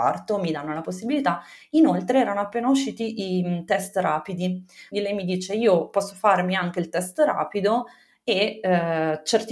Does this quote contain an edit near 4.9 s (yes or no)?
yes